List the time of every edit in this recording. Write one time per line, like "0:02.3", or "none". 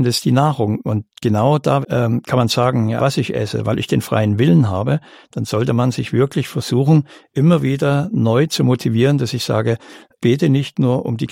0:01.8
0:03.0
0:10.2